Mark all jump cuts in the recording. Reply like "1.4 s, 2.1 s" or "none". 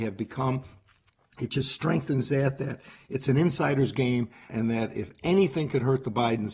4.5 s